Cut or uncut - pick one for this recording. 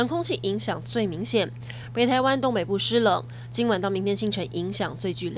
uncut